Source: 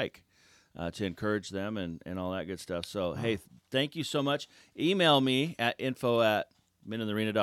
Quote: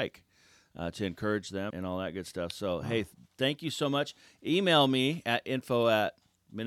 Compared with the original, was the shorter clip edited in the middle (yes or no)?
yes